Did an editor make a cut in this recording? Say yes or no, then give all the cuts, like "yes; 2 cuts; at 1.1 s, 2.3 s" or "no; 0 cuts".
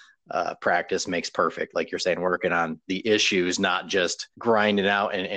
yes; 1 cut; at 4.3 s